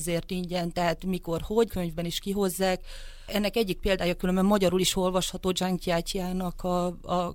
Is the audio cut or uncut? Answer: cut